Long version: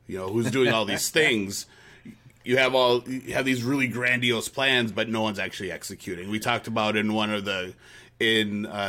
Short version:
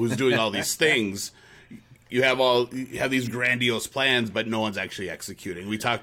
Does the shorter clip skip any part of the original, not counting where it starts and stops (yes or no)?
yes